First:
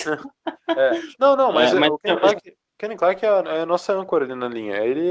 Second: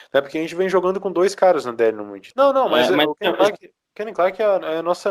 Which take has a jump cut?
second; 1 cut; at 2.3 s

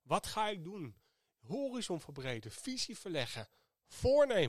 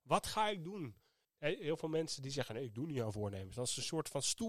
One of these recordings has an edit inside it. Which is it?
second; 1 cut; at 1.2 s

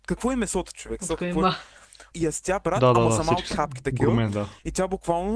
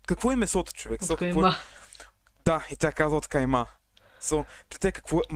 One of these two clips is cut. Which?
first; 1 cut; at 2.1 s

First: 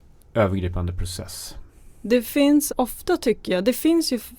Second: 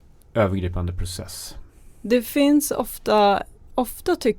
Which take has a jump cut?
first; 1 cut; at 2.7 s

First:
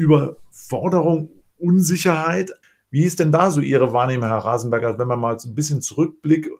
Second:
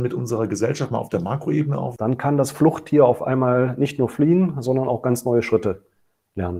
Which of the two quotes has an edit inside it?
second; 1 cut; at 2.0 s

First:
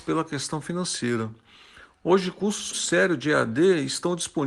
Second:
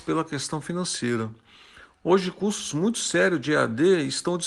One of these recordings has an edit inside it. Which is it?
first; 1 cut; at 2.7 s

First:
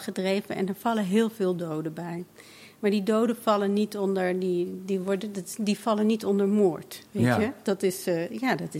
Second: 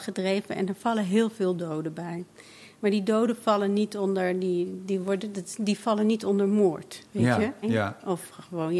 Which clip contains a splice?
second; 1 cut; at 7.6 s

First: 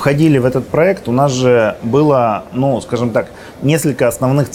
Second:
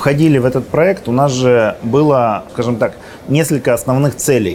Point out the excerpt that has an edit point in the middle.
second; 1 cut; at 2.5 s

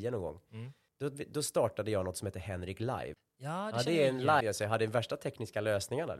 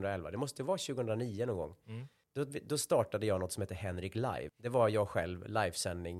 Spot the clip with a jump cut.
first; 2 cuts; at 3.2 s, 4.4 s

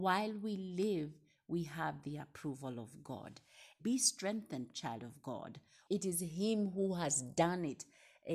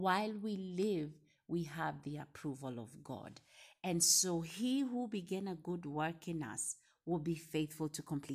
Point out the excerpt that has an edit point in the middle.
first; 2 cuts; at 3.8 s, 5.9 s

